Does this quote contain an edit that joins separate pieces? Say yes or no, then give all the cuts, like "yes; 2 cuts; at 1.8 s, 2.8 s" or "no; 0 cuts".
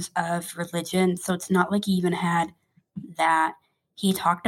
no; 0 cuts